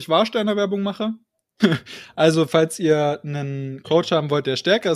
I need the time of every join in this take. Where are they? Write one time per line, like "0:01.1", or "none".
0:01.6

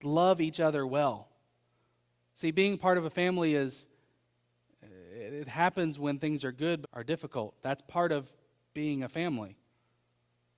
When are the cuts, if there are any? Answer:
0:06.8

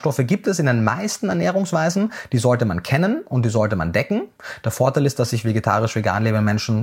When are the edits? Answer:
none

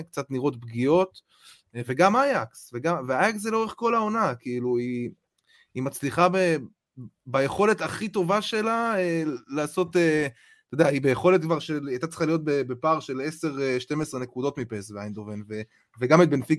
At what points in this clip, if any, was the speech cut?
none

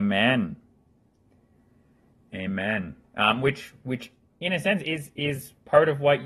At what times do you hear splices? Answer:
none

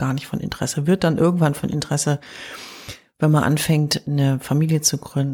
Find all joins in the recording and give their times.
0:04.0

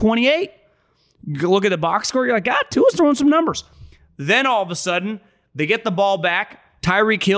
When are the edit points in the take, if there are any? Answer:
none

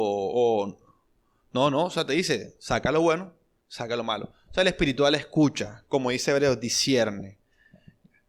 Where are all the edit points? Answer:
none

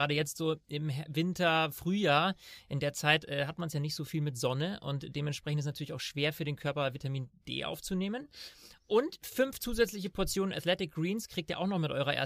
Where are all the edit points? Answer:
none

